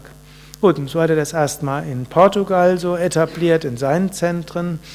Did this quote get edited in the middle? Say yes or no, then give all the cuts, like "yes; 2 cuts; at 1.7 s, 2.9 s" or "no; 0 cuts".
no; 0 cuts